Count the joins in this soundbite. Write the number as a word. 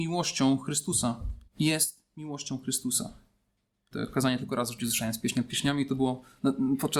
two